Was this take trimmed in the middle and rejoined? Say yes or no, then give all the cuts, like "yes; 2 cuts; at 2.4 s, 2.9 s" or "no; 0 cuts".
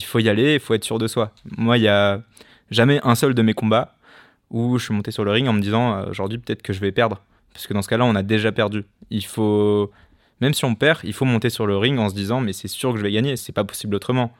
yes; 1 cut; at 13.4 s